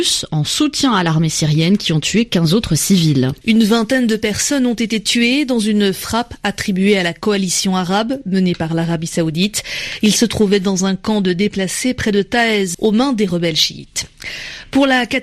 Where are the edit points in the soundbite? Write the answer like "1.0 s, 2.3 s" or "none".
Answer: 3.4 s, 12.7 s